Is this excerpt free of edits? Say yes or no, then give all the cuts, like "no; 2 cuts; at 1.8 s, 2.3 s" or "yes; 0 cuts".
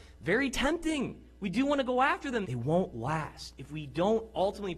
no; 1 cut; at 2.4 s